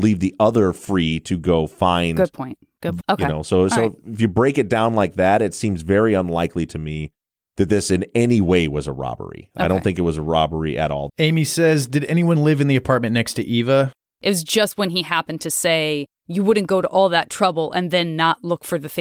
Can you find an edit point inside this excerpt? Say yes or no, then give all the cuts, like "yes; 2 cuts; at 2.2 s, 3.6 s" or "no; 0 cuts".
yes; 3 cuts; at 3.0 s, 11.1 s, 14.1 s